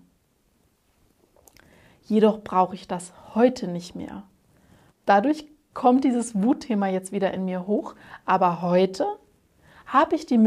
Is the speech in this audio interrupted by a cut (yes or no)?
yes